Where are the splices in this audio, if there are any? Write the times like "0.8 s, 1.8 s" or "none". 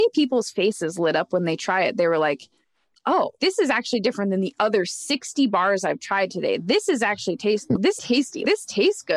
8.0 s